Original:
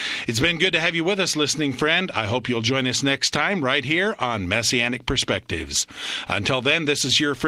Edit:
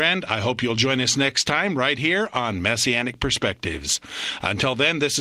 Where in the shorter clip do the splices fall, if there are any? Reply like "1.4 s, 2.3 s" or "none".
none

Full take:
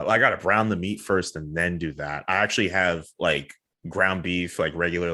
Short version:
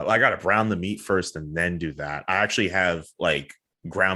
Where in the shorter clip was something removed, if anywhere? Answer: none

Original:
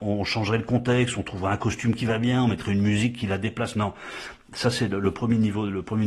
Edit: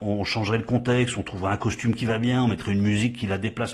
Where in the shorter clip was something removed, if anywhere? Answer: none

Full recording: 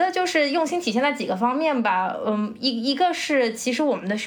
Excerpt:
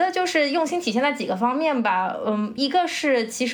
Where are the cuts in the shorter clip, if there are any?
2.6 s

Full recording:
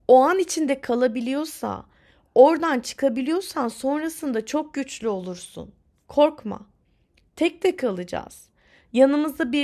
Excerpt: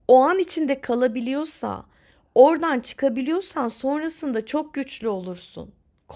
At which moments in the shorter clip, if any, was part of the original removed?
none

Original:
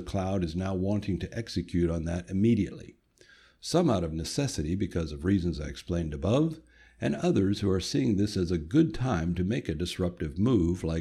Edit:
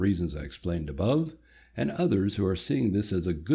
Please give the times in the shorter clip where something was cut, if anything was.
none

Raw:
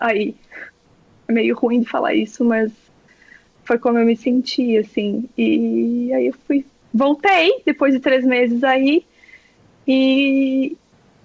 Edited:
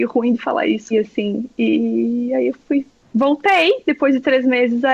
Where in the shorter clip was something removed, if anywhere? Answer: 0.9 s

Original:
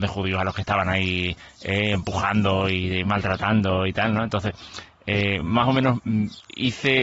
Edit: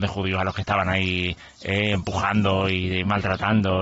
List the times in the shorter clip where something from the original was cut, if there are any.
none

